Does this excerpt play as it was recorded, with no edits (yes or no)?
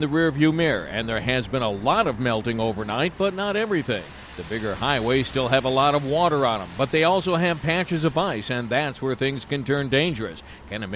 yes